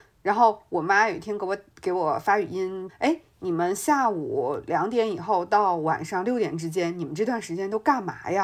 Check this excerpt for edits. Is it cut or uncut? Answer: cut